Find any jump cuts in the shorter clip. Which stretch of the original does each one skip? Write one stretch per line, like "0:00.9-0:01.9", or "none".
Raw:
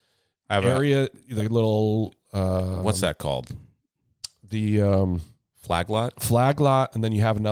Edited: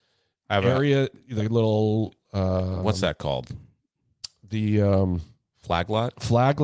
none

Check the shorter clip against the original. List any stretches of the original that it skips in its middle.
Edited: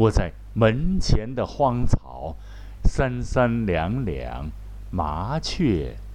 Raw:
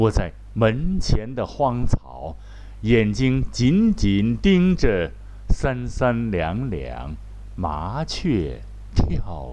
0:02.8-0:05.4

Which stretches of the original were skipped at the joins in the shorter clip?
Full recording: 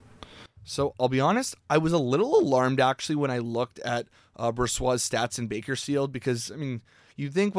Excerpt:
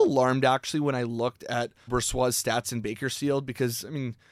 0:04.2-0:04.5

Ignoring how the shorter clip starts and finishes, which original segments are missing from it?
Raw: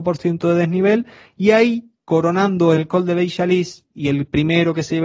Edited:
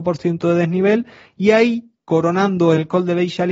none

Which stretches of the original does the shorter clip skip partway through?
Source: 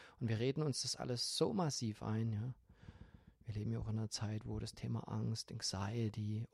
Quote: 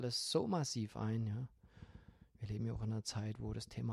none

